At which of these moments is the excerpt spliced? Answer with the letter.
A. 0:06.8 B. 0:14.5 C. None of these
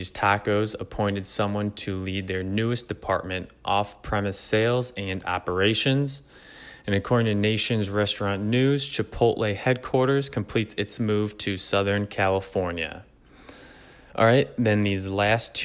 C